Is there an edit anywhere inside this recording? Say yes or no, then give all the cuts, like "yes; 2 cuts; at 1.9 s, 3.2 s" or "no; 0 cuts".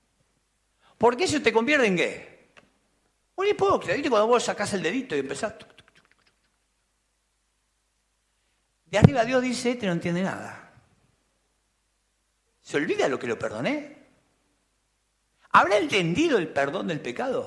no; 0 cuts